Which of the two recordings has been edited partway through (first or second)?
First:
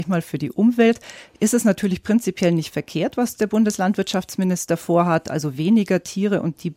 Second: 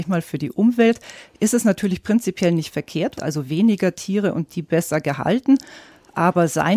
second